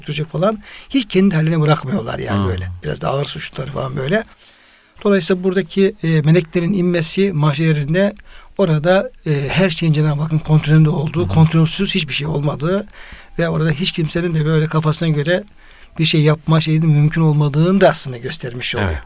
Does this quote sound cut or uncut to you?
uncut